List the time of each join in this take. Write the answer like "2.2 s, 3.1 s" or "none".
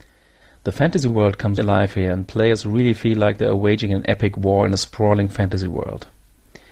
1.6 s